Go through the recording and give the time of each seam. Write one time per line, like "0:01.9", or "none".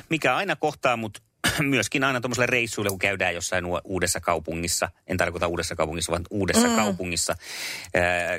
none